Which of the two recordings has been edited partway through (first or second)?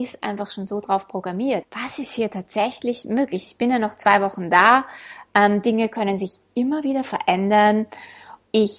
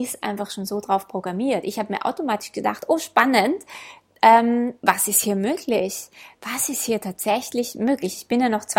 first